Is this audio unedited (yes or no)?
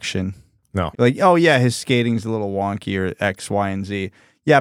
no